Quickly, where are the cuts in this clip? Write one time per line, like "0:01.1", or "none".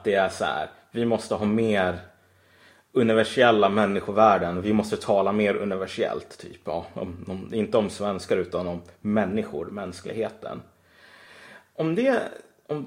none

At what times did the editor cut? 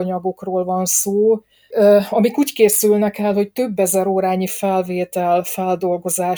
0:01.7

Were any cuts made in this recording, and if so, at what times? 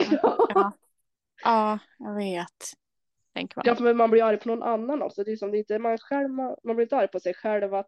0:03.2

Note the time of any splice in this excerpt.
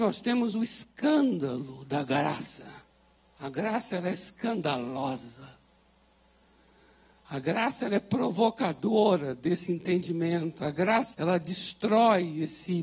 0:11.1

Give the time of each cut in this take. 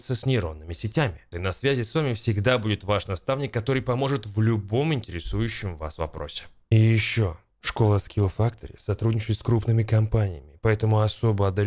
0:01.3

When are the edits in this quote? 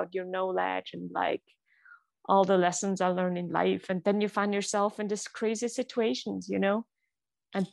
none

